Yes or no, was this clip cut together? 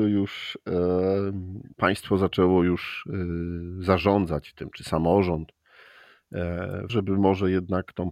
yes